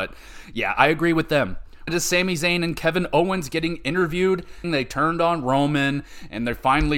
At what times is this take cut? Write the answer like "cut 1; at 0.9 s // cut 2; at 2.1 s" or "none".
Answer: cut 1; at 1.9 s // cut 2; at 4.6 s